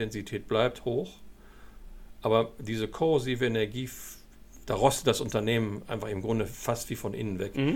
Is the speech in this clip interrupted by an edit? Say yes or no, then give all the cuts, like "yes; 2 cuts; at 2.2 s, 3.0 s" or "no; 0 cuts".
no; 0 cuts